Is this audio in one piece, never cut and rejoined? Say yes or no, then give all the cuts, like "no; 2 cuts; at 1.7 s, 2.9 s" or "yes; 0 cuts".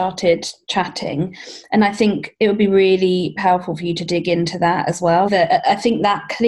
no; 1 cut; at 5.3 s